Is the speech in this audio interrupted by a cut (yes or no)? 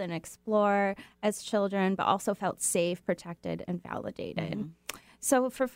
no